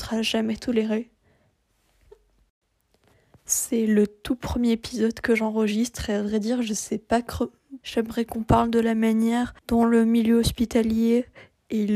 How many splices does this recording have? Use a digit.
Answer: 2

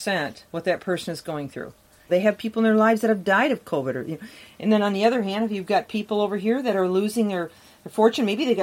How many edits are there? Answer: 1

